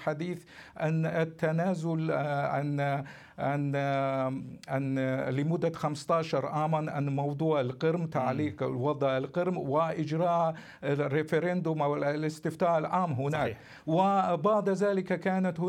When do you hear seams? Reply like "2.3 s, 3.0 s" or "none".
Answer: none